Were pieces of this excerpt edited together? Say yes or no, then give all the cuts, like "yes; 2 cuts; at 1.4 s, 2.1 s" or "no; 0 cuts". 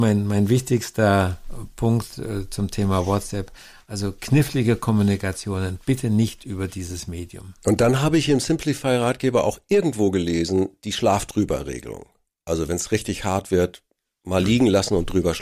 no; 0 cuts